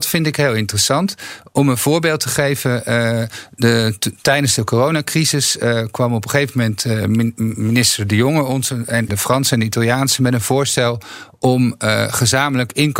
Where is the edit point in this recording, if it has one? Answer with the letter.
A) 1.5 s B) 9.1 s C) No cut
B